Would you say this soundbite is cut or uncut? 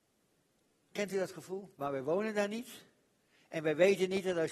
cut